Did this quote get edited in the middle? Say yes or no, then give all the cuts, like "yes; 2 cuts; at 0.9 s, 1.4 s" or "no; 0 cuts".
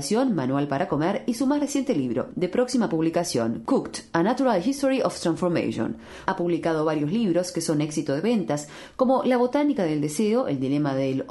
yes; 1 cut; at 6.3 s